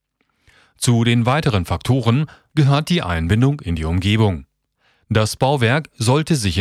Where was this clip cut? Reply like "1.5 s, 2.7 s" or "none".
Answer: none